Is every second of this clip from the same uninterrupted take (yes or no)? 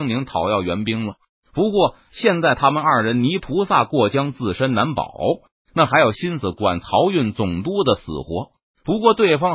yes